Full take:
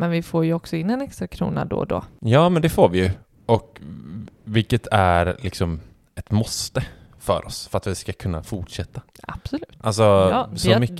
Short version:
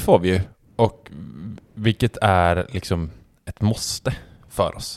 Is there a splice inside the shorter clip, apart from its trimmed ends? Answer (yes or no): no